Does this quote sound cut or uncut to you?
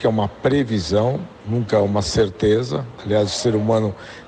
uncut